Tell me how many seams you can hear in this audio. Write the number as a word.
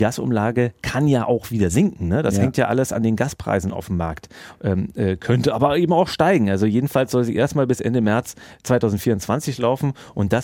zero